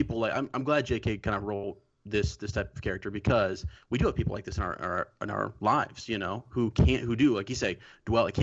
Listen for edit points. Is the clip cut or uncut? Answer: uncut